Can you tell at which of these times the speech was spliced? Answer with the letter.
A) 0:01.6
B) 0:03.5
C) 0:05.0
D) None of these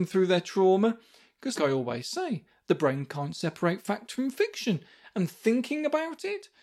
A